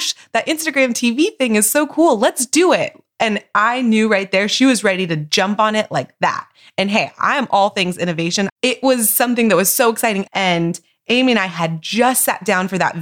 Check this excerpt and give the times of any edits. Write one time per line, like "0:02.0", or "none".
0:08.5
0:10.3